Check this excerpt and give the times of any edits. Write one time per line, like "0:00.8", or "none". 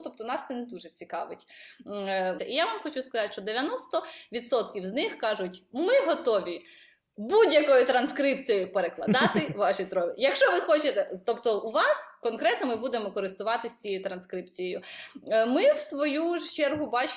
0:02.4